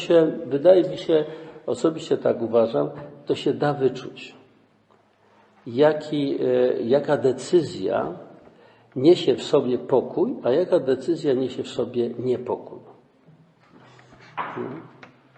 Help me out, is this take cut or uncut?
uncut